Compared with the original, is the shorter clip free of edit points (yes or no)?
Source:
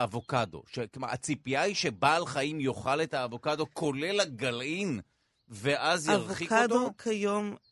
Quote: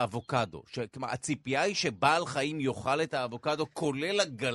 yes